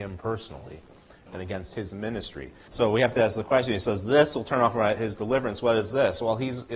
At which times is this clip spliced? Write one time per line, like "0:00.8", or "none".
0:02.7